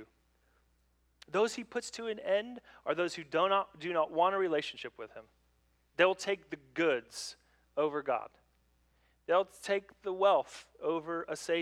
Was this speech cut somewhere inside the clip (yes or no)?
no